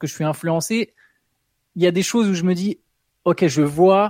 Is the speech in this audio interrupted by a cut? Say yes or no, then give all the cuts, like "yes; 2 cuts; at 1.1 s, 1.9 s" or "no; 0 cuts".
no; 0 cuts